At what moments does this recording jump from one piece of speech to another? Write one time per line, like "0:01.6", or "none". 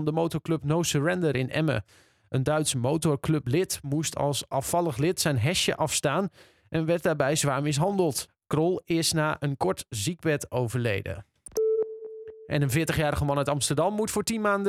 0:08.3